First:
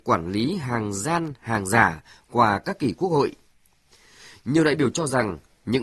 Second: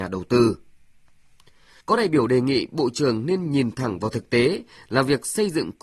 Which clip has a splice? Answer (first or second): second